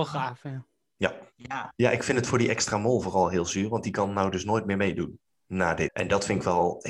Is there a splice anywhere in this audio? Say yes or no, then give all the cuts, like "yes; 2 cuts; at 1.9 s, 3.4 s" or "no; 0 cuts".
yes; 2 cuts; at 1.7 s, 5.9 s